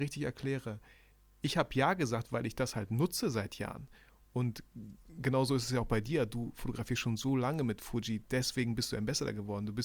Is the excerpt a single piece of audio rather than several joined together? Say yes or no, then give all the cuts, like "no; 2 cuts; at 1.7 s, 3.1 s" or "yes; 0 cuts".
yes; 0 cuts